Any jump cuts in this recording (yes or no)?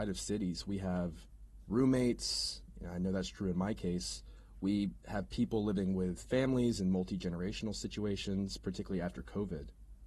no